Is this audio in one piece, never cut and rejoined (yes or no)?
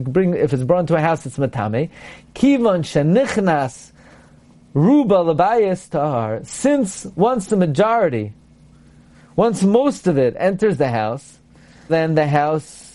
no